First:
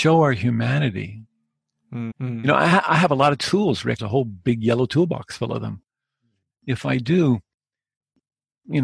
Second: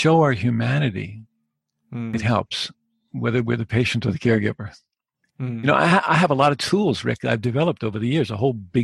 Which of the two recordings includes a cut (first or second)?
first